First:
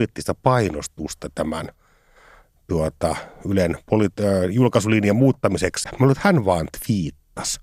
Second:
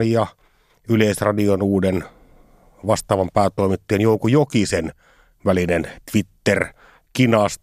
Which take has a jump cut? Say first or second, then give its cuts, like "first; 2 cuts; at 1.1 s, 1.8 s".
first; 1 cut; at 5.8 s